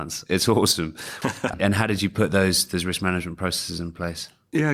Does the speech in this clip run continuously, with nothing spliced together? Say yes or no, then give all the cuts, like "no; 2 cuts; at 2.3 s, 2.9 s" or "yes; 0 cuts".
no; 1 cut; at 1.2 s